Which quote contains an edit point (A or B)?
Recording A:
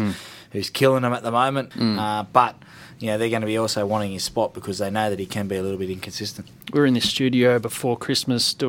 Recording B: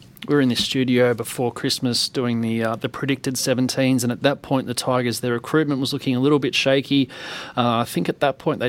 A